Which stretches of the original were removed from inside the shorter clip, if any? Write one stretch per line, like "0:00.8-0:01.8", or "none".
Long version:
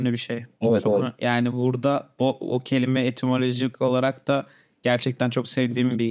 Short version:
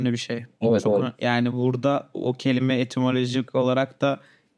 0:02.1-0:02.4